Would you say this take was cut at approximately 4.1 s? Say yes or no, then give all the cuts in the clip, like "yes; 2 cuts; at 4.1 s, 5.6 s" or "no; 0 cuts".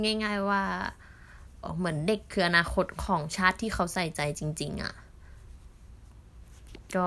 no; 1 cut; at 1.6 s